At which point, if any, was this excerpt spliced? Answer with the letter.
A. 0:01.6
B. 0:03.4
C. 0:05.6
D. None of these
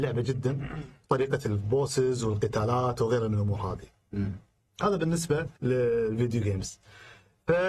C